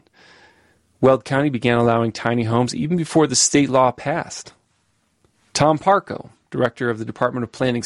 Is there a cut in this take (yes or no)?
no